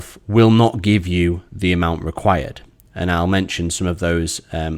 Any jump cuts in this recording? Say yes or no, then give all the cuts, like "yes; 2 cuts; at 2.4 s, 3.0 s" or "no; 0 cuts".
no; 0 cuts